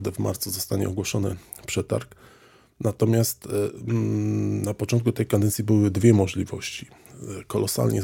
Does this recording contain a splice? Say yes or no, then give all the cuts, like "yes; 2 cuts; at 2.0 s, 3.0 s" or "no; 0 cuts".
no; 0 cuts